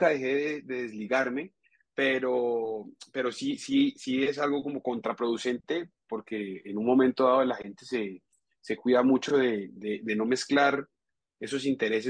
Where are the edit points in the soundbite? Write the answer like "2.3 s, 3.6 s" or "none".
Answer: none